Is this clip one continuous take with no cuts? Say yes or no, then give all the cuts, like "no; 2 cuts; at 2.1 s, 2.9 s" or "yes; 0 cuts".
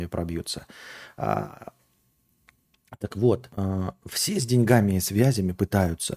yes; 0 cuts